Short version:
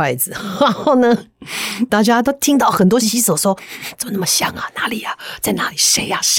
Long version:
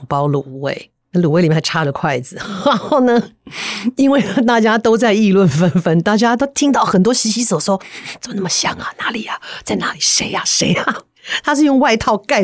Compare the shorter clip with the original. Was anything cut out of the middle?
yes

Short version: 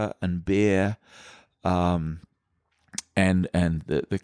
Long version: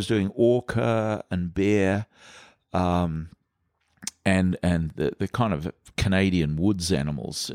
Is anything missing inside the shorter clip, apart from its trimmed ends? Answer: no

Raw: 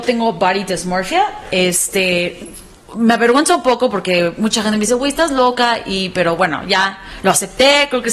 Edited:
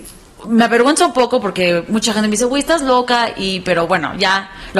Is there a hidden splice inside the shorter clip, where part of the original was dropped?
no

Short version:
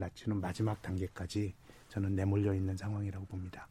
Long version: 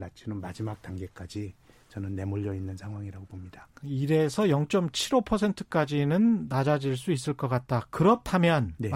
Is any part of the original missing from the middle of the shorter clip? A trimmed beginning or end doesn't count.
no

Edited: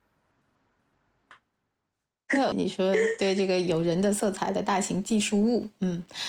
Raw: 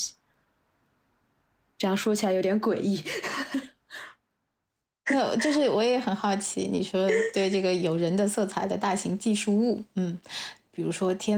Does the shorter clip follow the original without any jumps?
no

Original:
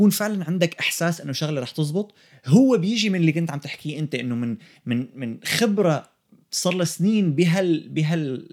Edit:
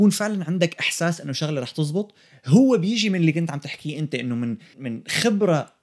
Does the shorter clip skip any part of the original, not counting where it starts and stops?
yes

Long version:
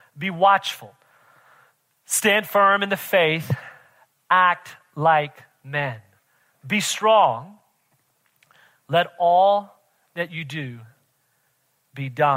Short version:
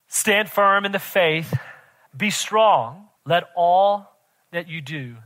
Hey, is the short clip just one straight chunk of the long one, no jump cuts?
no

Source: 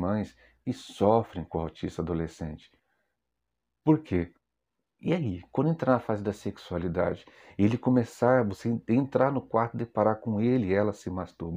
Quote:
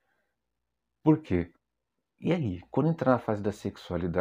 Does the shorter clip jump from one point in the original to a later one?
no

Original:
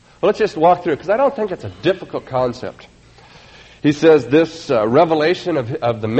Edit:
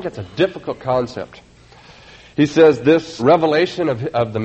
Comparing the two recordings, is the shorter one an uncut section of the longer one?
no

